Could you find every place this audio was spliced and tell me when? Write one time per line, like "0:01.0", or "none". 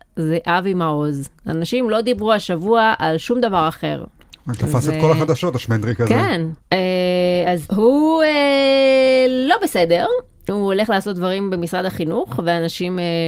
none